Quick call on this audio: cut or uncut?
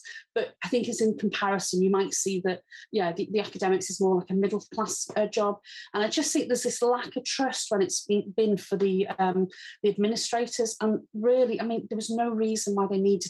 uncut